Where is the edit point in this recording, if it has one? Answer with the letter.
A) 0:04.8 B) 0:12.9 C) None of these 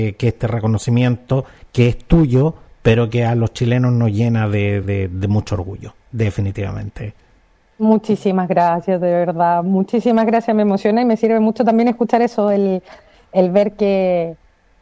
C